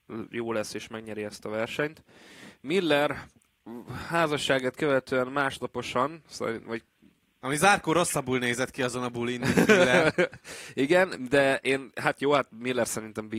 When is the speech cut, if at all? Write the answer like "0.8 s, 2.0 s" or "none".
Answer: none